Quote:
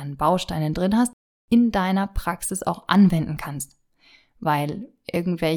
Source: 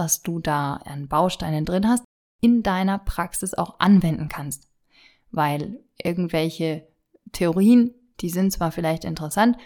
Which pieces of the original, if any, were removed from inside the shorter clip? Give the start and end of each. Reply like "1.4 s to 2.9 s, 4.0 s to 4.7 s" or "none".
none

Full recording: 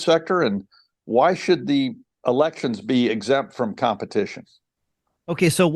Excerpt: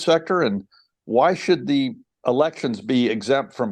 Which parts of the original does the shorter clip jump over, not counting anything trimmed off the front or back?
none

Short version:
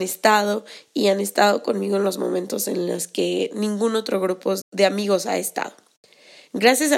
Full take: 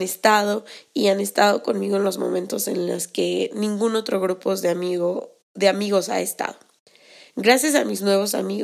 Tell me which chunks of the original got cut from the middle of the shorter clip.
4.6 s to 5.4 s

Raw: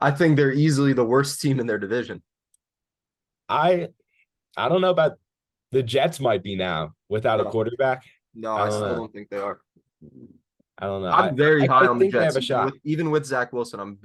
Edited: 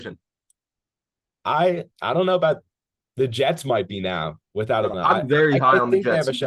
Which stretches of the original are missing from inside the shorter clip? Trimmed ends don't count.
4.0 s to 4.5 s, 7.5 s to 11.0 s

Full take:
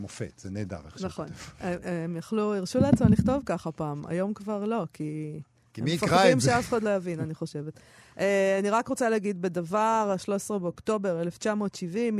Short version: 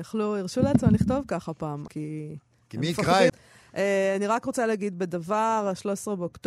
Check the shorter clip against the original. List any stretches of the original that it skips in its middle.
4.1 s to 4.9 s, 6.3 s to 7.7 s

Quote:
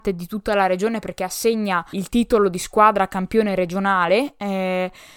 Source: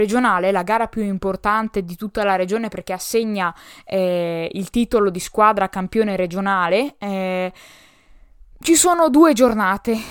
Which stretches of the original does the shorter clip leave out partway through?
3.6 s to 4.5 s

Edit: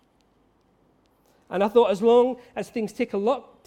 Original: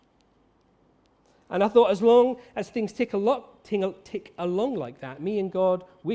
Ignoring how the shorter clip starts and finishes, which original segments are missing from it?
none

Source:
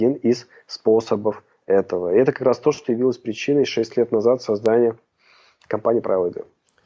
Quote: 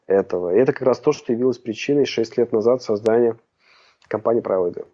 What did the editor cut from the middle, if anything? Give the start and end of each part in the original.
none

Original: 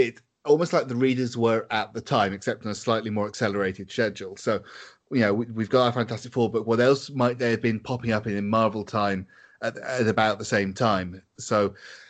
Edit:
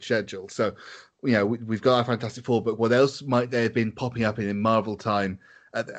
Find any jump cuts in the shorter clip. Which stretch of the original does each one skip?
none

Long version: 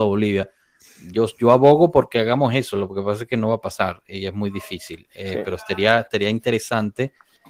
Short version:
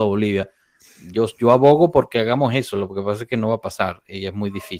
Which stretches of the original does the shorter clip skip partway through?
none

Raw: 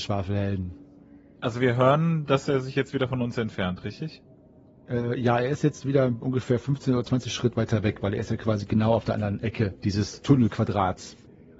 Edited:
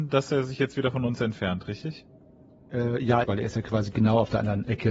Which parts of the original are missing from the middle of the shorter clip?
5.4 s to 8.0 s

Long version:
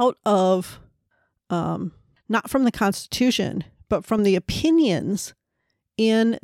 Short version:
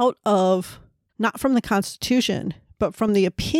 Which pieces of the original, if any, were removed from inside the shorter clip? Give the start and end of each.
1.1 s to 2.2 s

